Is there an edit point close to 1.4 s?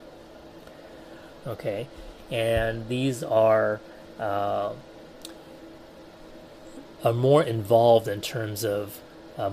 yes; 1 cut; at 1.4 s

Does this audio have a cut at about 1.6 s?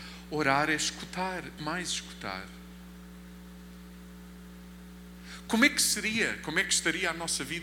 yes; 1 cut; at 1.6 s

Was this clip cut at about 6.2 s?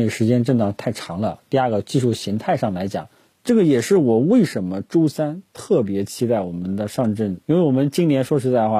no; 2 cuts; at 3.3 s, 7.4 s

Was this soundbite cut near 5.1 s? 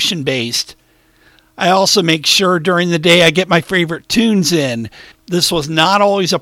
yes; 1 cut; at 5.1 s

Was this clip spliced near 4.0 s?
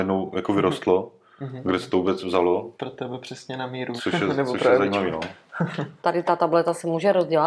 yes; 3 cuts; at 2.7 s, 4.0 s, 6.0 s

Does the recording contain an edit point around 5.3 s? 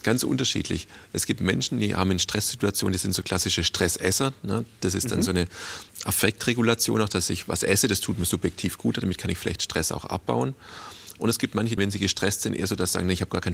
no; 1 cut; at 11.8 s

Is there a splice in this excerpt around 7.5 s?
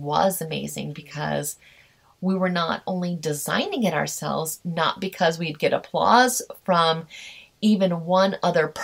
no; 1 cut; at 4.6 s

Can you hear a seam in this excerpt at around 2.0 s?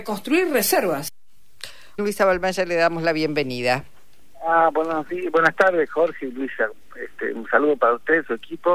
yes; 1 cut; at 2.0 s

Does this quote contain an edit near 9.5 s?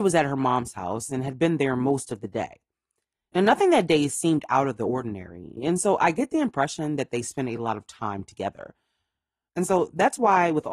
yes; 2 cuts; at 5.6 s, 9.5 s

